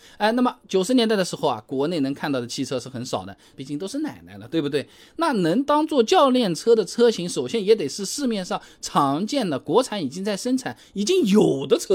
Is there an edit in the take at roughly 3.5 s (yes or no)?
yes